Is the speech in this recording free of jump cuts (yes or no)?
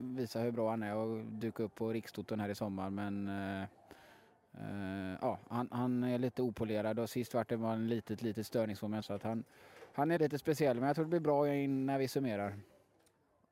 no